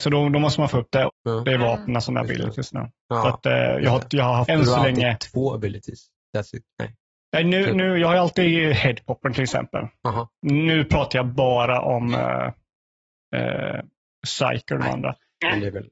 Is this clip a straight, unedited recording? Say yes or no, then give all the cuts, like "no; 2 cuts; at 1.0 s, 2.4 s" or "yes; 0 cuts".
no; 3 cuts; at 1.1 s, 4.5 s, 14.8 s